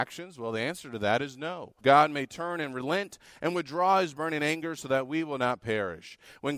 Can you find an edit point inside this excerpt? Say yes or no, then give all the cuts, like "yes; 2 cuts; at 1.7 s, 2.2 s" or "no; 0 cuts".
yes; 1 cut; at 1.8 s